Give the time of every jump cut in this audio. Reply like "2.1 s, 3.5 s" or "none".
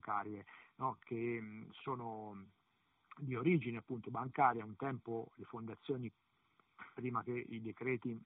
none